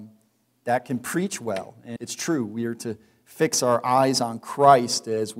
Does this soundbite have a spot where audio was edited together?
yes; 1 cut; at 2.0 s

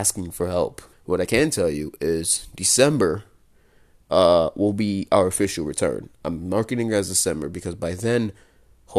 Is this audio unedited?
no; 1 cut; at 0.9 s

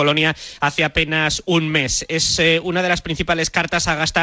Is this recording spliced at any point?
no; 0 cuts

